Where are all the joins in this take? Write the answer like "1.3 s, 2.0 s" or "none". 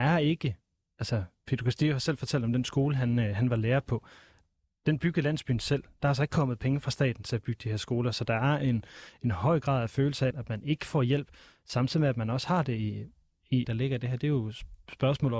10.3 s, 13.6 s